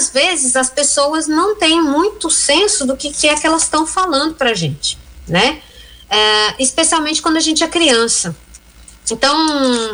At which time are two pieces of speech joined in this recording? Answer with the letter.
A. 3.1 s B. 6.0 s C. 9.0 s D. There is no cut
D